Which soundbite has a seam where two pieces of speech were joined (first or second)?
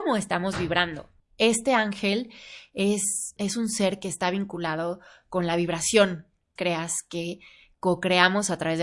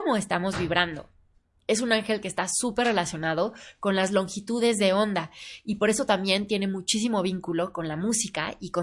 first